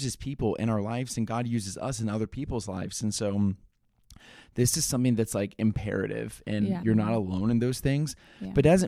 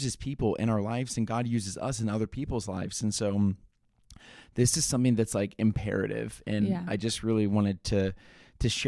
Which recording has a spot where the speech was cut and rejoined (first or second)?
first